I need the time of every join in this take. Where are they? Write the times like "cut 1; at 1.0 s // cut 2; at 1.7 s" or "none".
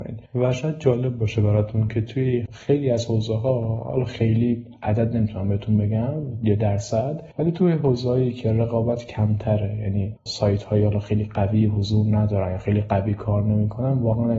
none